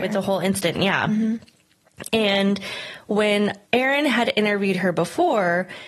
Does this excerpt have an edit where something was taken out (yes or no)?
yes